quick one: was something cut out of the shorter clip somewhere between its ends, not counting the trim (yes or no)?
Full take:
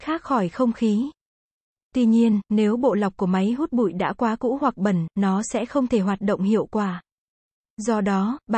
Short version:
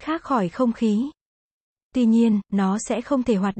yes